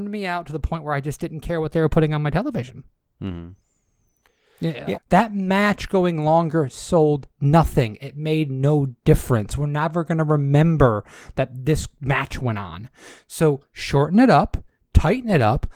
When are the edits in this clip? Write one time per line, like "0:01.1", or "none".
0:04.9